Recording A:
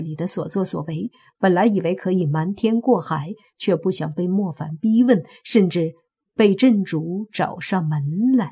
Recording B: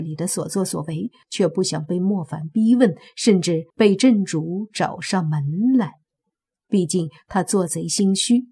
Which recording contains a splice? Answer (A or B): B